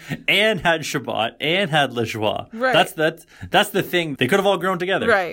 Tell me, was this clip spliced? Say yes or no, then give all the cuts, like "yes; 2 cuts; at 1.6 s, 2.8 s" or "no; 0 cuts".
yes; 1 cut; at 4.2 s